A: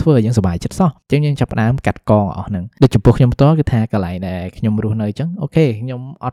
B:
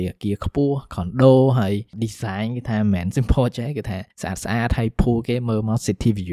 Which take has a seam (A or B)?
B